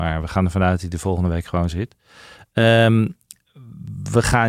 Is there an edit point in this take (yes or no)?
no